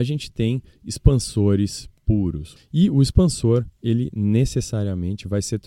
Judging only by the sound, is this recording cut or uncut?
cut